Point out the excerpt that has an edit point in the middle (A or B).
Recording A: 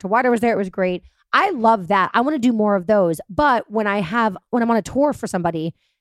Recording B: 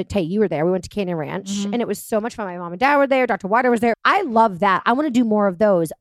B